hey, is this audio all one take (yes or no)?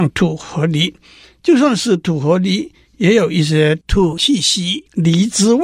yes